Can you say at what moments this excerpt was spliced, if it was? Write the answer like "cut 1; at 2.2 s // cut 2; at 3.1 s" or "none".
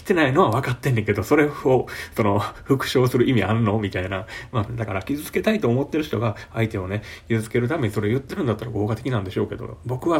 cut 1; at 4.7 s